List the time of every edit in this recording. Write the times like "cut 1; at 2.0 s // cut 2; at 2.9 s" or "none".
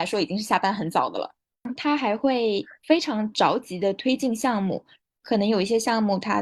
cut 1; at 1.8 s